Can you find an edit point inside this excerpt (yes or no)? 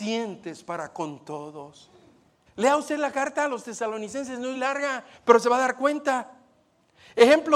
yes